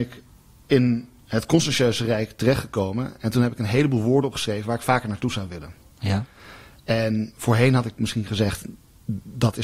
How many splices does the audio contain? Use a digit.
0